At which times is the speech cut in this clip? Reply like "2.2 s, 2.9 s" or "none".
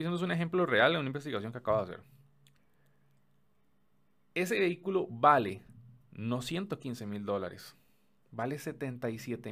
none